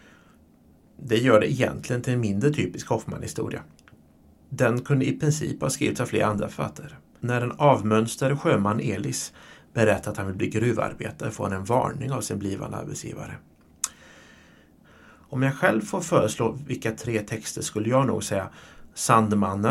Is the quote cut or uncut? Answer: cut